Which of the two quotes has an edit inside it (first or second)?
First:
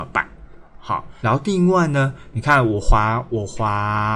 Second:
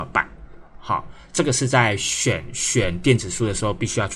first